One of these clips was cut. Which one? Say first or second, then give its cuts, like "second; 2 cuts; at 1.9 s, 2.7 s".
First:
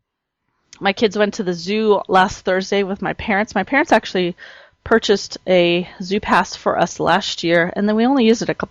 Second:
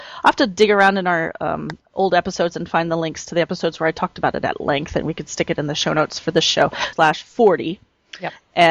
second; 1 cut; at 6.9 s